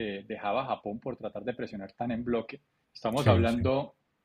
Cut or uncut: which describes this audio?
cut